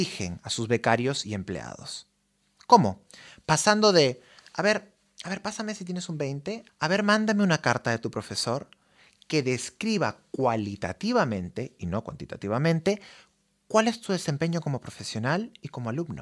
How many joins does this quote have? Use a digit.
1